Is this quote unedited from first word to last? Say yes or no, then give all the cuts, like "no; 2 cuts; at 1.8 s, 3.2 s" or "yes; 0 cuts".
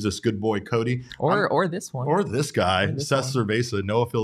yes; 0 cuts